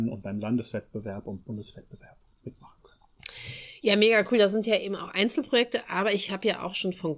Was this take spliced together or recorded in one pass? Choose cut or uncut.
uncut